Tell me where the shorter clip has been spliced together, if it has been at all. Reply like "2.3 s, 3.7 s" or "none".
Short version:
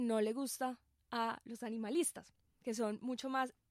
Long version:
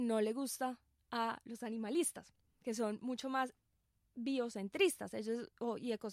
none